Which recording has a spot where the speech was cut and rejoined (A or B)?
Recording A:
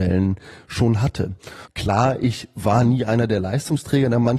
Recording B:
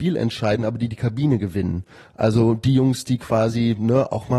A